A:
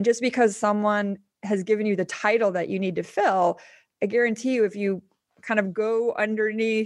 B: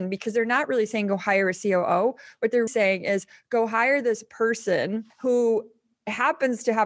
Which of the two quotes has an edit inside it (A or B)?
B